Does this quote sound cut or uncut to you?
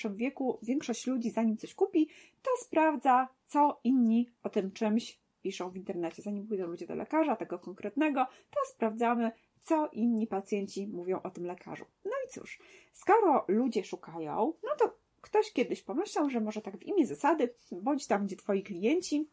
uncut